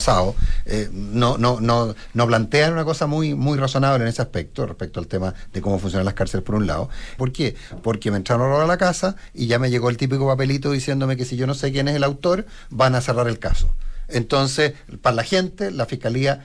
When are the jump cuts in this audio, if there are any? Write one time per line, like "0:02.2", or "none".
0:07.2